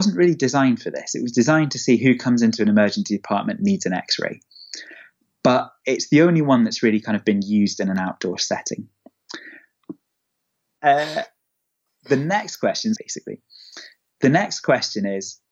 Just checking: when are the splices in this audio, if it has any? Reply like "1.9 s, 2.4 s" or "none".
10.8 s, 13.0 s